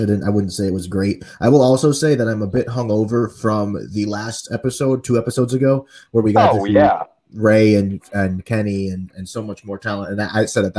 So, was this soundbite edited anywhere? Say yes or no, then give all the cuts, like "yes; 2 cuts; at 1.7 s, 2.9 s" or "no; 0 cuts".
no; 0 cuts